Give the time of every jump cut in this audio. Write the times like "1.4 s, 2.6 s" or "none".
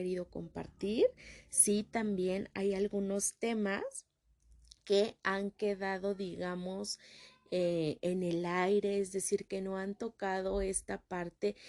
none